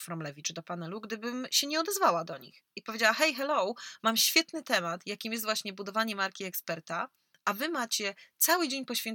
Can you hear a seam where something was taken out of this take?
no; 0 cuts

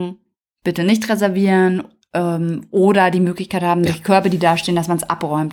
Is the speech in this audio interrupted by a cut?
no; 0 cuts

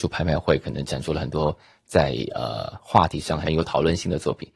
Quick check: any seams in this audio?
no; 0 cuts

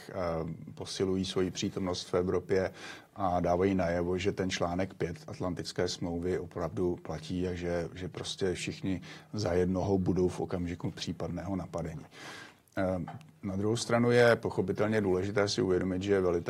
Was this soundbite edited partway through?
no; 0 cuts

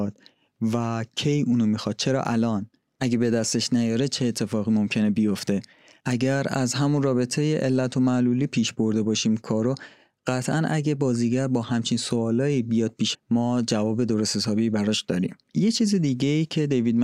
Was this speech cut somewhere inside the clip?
yes; 2 cuts; at 13.1 s, 15.4 s

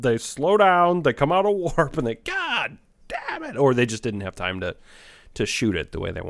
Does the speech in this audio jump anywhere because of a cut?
no; 0 cuts

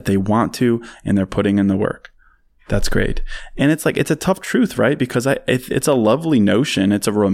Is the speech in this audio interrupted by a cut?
no; 0 cuts

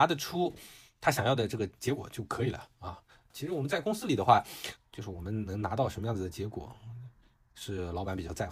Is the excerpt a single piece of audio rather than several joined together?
no; 2 cuts; at 3.3 s, 4.8 s

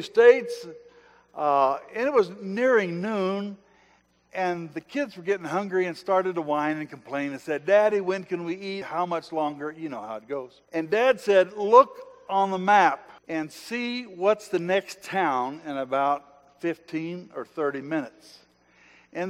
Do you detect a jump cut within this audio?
yes; 3 cuts; at 8.8 s, 10.6 s, 13.2 s

